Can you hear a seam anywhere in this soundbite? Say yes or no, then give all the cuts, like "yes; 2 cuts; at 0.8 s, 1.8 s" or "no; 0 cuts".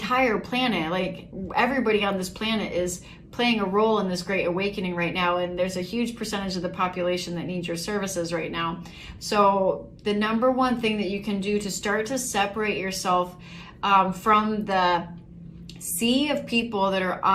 yes; 1 cut; at 9.2 s